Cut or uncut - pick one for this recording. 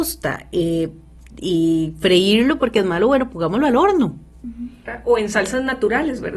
uncut